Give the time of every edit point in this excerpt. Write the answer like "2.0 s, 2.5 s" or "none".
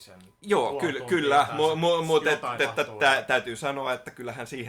2.6 s